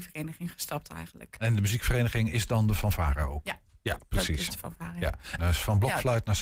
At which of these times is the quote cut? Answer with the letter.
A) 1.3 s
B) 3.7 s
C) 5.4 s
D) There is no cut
C